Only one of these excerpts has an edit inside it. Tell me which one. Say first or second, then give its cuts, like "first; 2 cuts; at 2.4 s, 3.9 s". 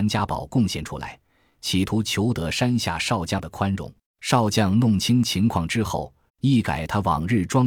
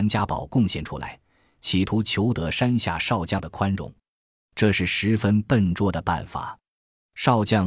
first; 2 cuts; at 4.1 s, 6.3 s